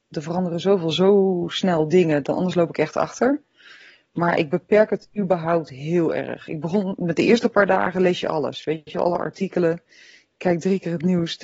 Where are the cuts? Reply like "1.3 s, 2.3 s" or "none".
none